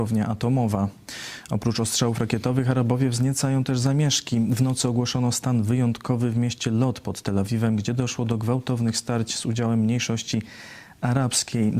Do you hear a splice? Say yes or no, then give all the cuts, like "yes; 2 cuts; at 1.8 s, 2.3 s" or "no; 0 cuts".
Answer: no; 0 cuts